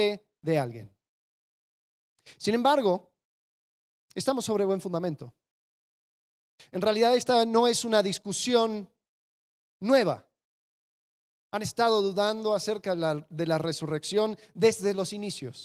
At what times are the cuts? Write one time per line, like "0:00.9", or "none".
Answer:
none